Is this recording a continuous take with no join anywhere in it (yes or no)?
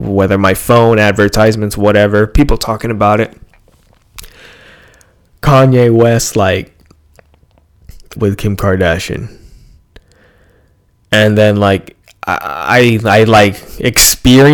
no